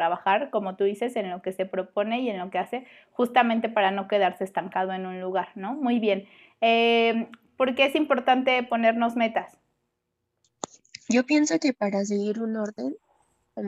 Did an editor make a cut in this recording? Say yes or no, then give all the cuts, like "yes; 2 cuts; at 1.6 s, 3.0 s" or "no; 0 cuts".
yes; 1 cut; at 7.5 s